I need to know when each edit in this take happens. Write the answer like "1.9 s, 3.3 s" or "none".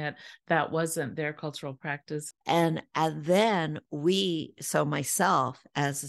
2.4 s